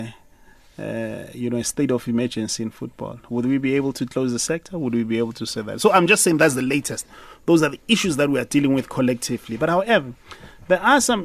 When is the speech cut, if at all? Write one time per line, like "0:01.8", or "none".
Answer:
none